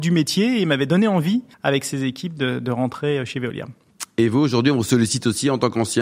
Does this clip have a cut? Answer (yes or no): yes